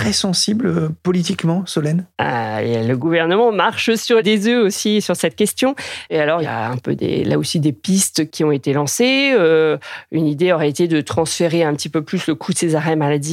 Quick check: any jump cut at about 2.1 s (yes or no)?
no